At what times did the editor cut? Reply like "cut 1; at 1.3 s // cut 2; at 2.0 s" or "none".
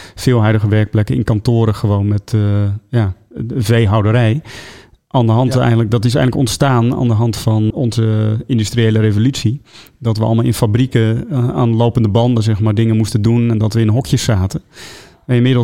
cut 1; at 7.7 s